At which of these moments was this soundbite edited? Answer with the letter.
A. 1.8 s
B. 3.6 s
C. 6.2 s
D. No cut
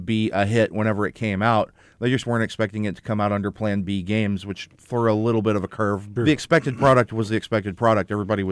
C